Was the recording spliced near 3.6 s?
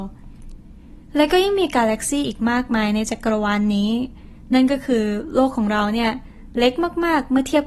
no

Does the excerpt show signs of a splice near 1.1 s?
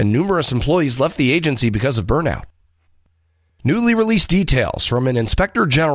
no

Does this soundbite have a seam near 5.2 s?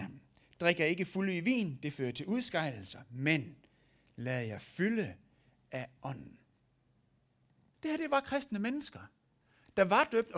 no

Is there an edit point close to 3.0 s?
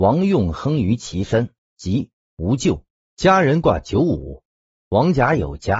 yes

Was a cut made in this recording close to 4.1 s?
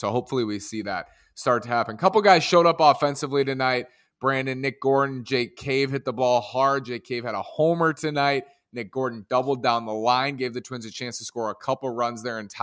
no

